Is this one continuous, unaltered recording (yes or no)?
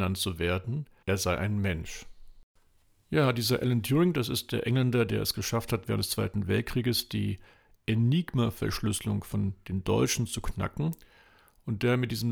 no